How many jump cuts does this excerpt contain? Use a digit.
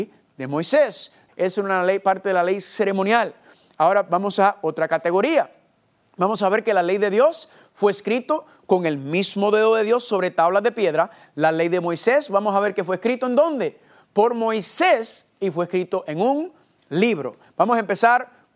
1